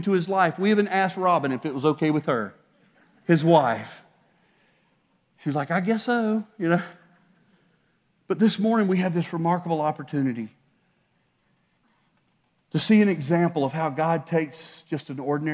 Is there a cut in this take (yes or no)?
no